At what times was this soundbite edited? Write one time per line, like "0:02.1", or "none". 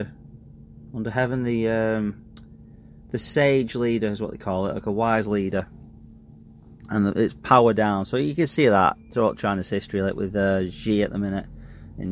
none